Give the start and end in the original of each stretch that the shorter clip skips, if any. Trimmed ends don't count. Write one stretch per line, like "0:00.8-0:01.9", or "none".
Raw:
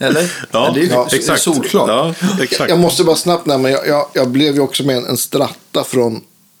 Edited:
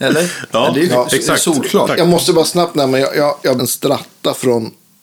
0:01.9-0:02.6
0:04.3-0:05.1